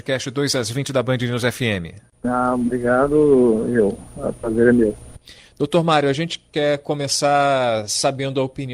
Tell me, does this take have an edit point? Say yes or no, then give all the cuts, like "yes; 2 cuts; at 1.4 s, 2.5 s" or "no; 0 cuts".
no; 0 cuts